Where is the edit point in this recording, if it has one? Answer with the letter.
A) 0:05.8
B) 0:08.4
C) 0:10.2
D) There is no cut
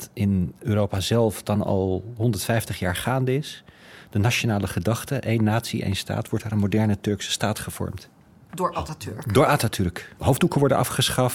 C